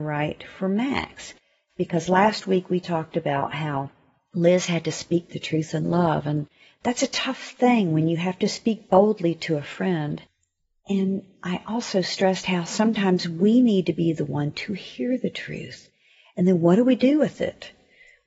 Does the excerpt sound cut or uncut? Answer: uncut